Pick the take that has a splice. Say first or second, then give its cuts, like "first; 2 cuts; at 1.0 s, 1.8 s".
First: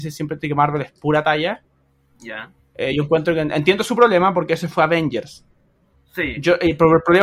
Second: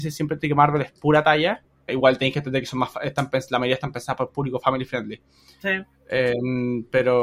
second; 1 cut; at 1.9 s